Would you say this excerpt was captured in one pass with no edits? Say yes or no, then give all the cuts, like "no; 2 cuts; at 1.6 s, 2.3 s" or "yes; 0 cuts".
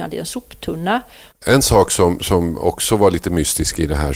no; 1 cut; at 1.3 s